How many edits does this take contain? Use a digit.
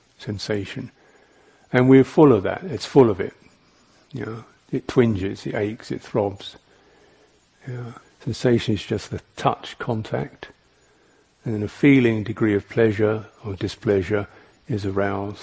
1